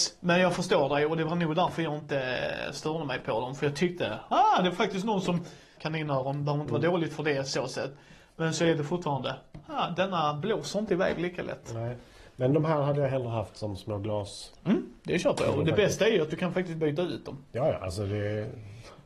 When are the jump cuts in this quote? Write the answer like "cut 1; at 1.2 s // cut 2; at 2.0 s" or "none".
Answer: cut 1; at 5.8 s